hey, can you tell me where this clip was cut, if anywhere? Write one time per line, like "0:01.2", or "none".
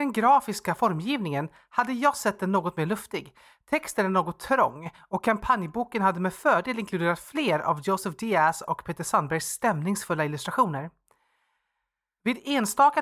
none